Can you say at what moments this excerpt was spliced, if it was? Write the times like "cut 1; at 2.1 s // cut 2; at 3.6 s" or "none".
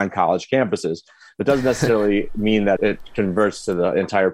cut 1; at 2.8 s